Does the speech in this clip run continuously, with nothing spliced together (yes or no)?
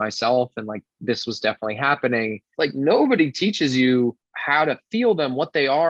no